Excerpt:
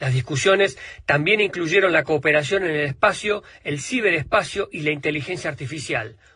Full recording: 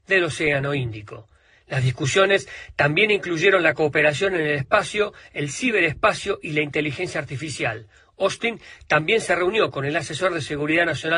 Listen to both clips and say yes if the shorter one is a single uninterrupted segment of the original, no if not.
yes